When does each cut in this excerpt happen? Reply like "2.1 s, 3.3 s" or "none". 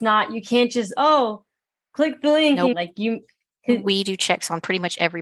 2.7 s